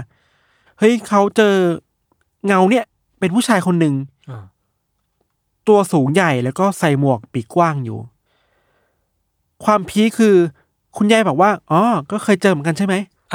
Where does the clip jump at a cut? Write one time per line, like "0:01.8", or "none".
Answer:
0:10.1